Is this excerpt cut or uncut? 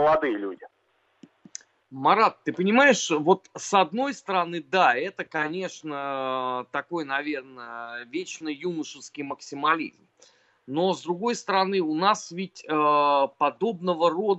uncut